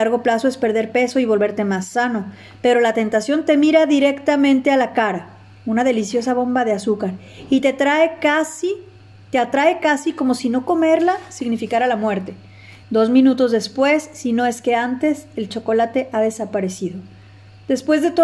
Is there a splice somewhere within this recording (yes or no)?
yes